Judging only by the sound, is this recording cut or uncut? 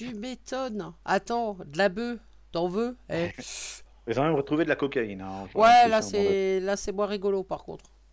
cut